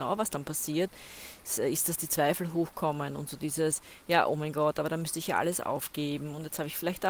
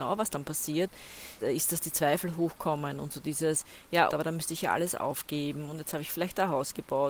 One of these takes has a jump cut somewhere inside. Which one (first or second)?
second